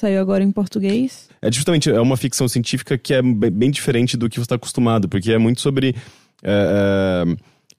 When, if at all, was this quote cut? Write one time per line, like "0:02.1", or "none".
0:01.3

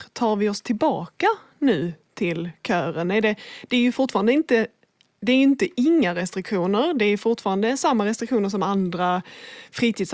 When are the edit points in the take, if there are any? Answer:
none

